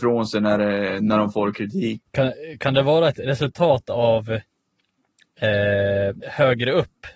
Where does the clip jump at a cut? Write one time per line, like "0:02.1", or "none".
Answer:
0:02.1
0:06.2